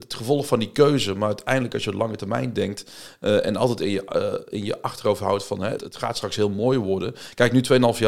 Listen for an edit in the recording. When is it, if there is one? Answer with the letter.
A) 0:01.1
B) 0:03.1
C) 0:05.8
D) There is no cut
C